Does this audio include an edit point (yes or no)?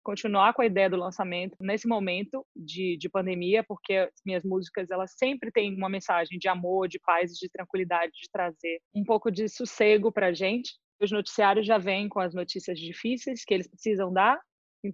yes